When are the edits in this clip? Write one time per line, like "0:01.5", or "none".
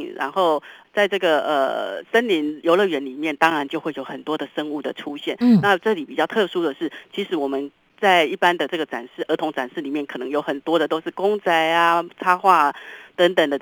none